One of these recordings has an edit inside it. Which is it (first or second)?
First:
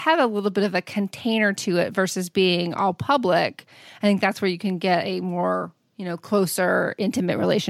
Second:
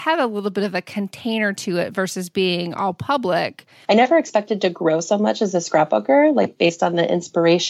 second